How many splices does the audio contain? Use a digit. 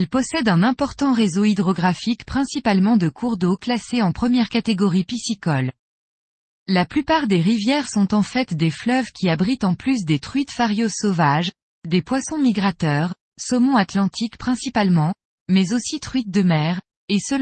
0